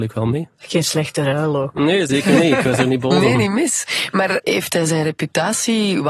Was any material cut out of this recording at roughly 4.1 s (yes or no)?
no